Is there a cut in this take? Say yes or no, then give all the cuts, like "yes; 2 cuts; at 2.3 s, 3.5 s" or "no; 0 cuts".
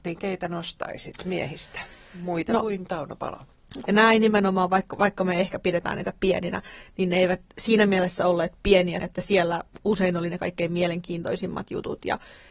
yes; 2 cuts; at 3.8 s, 9.0 s